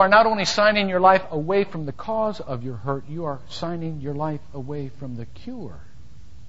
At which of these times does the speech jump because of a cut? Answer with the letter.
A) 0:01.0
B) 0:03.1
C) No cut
C